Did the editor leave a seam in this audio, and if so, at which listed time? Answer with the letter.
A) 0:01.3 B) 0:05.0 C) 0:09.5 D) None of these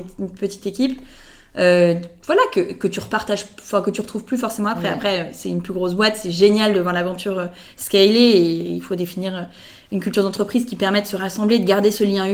D